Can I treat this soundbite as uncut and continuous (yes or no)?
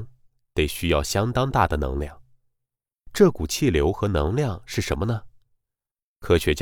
yes